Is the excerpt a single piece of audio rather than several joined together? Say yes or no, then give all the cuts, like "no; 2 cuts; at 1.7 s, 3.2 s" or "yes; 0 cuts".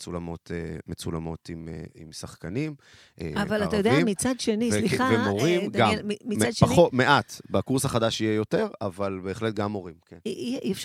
yes; 0 cuts